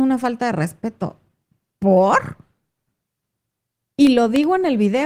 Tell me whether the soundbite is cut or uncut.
uncut